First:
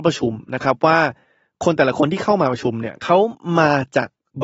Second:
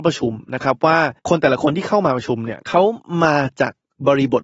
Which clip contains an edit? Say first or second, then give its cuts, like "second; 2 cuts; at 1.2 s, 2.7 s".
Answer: second; 1 cut; at 1.2 s